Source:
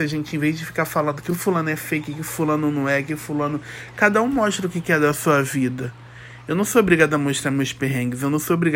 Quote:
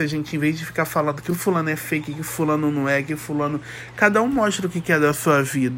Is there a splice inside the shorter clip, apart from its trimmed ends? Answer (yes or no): no